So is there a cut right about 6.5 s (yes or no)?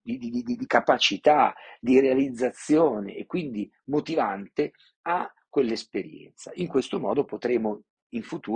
no